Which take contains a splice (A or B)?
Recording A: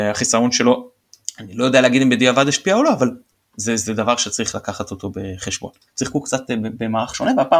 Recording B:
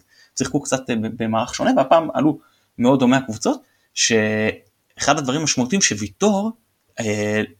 A